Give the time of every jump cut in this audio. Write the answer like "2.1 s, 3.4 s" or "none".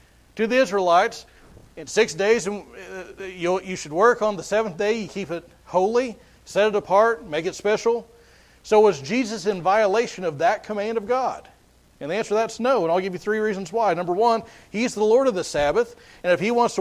none